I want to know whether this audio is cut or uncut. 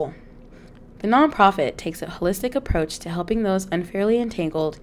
cut